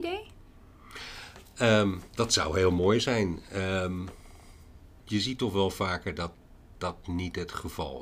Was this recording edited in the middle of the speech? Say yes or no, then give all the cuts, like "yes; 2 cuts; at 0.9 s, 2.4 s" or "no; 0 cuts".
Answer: no; 0 cuts